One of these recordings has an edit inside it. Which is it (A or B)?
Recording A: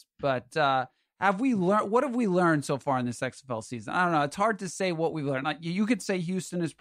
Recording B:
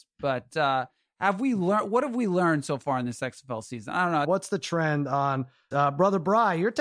B